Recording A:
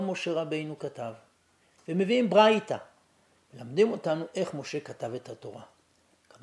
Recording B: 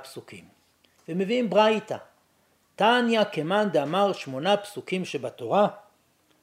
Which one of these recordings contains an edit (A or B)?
A